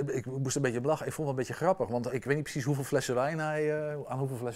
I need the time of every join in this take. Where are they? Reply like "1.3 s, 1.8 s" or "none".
2.1 s

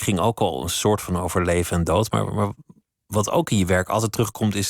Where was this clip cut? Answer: none

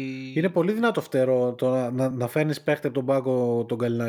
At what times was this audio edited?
none

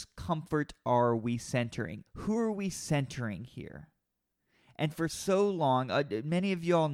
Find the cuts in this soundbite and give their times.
2.1 s

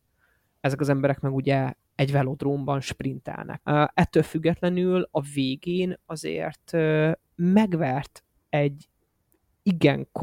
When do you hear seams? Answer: 3.6 s

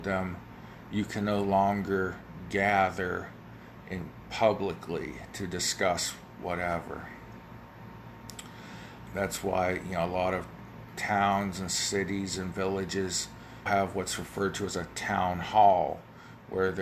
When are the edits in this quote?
9.1 s, 13.7 s

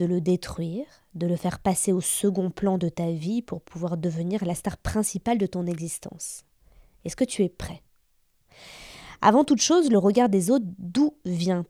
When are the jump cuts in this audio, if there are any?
none

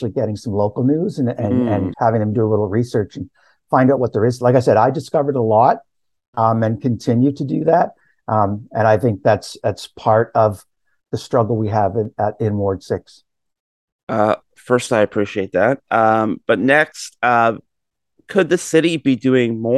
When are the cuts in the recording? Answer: 1.9 s

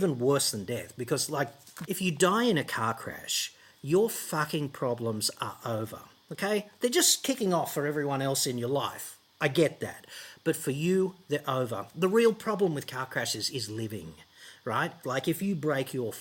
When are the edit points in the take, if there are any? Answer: 1.8 s, 15.0 s

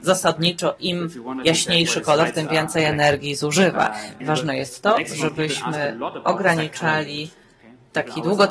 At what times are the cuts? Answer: 4.2 s

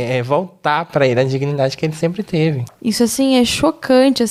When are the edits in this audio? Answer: 2.7 s

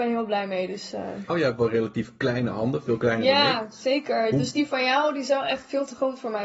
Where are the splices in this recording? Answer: 1.3 s

